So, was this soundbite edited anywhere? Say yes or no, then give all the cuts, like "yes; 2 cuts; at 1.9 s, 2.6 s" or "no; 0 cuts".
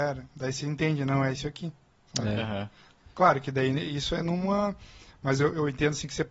no; 0 cuts